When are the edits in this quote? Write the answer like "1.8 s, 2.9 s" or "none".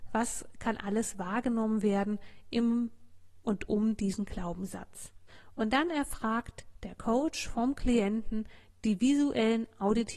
none